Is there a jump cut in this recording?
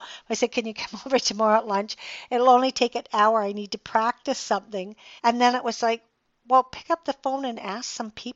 yes; 1 cut; at 5.2 s

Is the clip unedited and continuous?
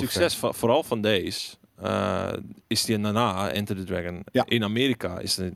no; 1 cut; at 2.6 s

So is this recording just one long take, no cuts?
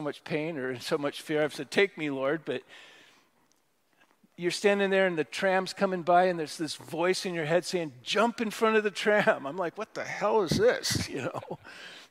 yes; 0 cuts

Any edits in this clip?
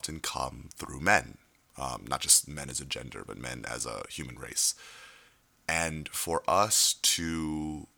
no; 0 cuts

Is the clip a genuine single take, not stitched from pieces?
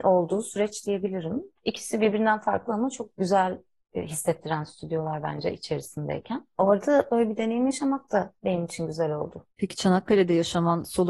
no; 1 cut; at 1.6 s

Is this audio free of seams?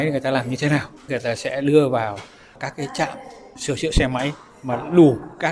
no; 1 cut; at 1.0 s

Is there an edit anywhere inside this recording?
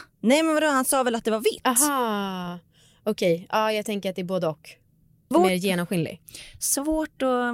yes; 1 cut; at 5.3 s

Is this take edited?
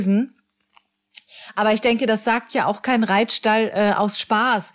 no; 0 cuts

